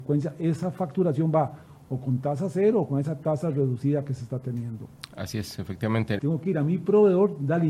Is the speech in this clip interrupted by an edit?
yes; 1 cut; at 6.2 s

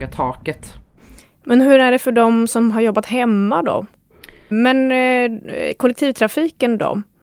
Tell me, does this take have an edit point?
yes; 1 cut; at 4.5 s

